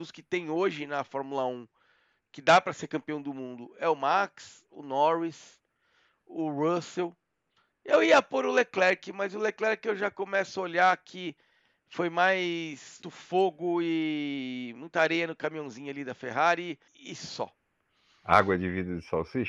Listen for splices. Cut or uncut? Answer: cut